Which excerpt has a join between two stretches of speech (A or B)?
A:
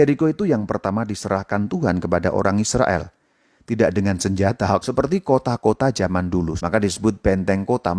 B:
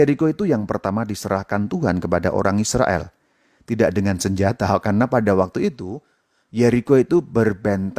A